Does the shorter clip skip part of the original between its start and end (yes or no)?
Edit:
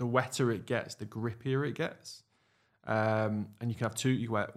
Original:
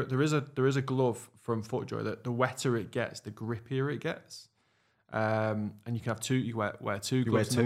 no